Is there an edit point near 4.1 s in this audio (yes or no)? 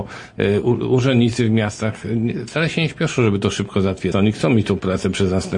yes